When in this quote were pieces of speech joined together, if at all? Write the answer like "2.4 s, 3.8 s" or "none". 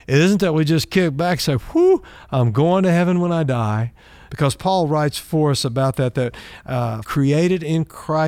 4.3 s, 7.0 s